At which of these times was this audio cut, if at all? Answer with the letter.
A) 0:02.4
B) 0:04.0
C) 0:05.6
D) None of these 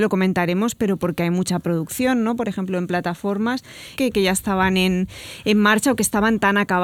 B